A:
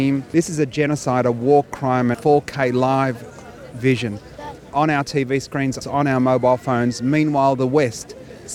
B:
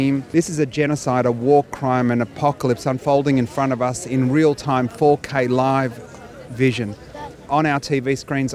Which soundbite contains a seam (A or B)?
A